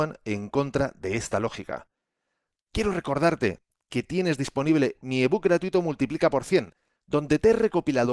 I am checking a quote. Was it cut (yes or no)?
no